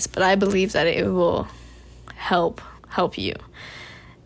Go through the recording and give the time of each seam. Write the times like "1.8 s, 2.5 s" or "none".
2.8 s